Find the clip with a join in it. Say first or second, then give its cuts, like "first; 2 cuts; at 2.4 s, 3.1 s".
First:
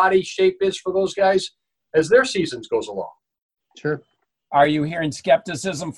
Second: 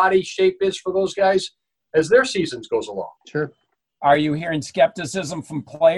second; 1 cut; at 3.2 s